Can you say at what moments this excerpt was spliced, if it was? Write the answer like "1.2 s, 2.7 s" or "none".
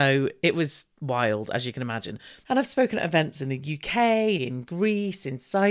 2.4 s, 4.4 s

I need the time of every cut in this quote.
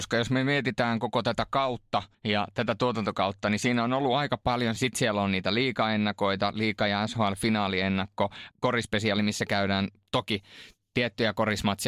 2.1 s, 4.8 s, 8.5 s

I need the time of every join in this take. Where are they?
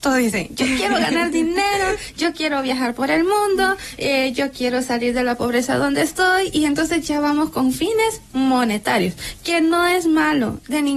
none

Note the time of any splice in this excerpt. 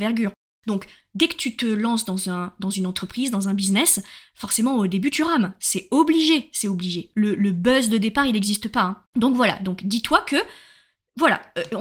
9.0 s

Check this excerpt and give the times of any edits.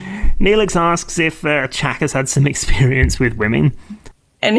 none

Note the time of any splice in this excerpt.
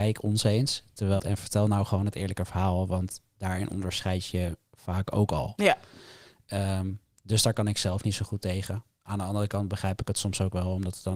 1.2 s

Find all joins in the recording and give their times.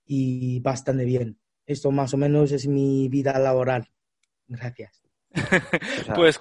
none

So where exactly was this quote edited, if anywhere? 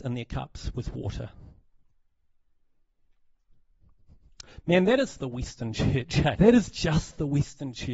6.3 s

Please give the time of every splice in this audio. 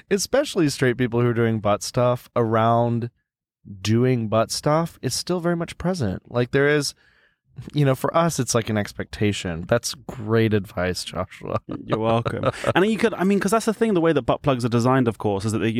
9.6 s

